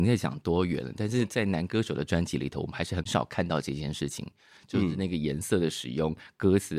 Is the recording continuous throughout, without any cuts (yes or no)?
yes